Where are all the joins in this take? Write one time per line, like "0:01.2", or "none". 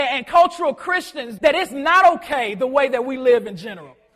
0:01.4

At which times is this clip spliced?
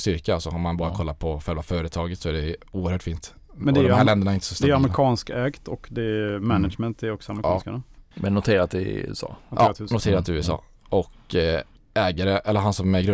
0:03.6

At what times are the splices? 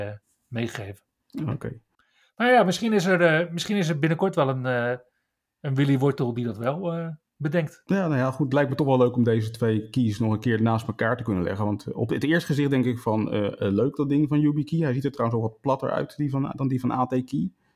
0:07.9

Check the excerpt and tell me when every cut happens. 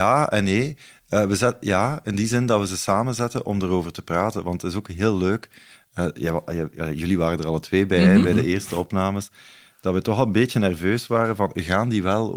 none

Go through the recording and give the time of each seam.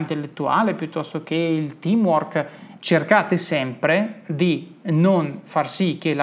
0:02.8

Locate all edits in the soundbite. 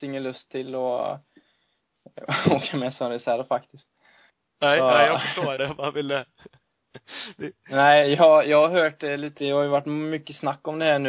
0:05.6
0:09.4

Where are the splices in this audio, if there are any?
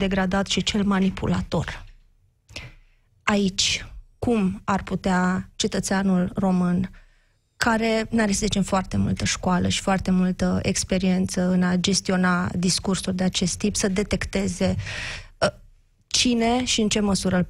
none

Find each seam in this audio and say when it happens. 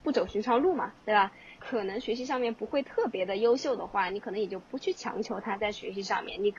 0:01.6

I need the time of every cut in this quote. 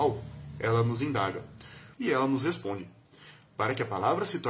0:01.9

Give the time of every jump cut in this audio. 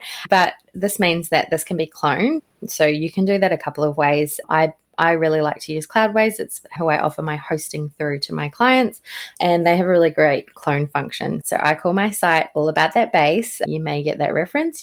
0:11.4

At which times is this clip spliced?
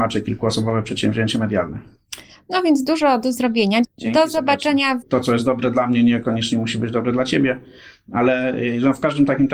0:03.8
0:05.0

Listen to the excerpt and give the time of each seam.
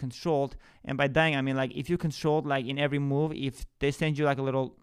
none

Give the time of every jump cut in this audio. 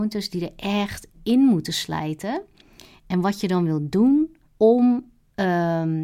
0:01.1
0:04.4

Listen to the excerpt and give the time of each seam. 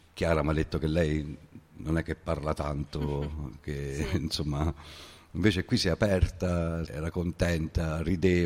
0:06.9

